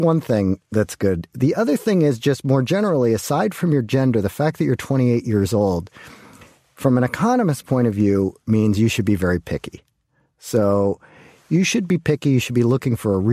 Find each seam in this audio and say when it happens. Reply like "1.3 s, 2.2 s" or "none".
none